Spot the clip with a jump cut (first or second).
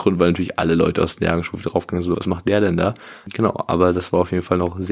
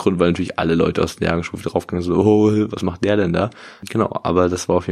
first